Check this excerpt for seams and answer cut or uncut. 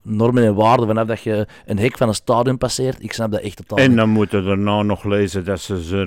uncut